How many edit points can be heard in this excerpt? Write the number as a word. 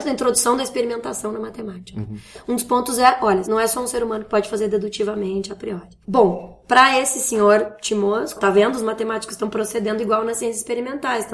three